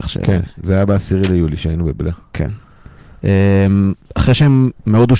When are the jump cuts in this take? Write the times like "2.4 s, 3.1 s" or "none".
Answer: 4.0 s